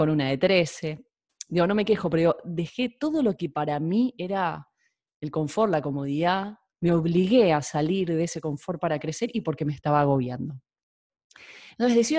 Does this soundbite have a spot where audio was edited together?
yes; 1 cut; at 6.7 s

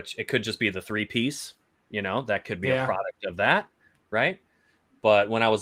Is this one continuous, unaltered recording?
yes; 0 cuts

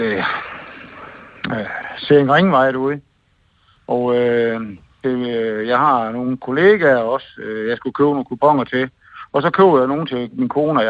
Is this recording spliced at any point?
yes; 2 cuts; at 3.8 s, 5.0 s

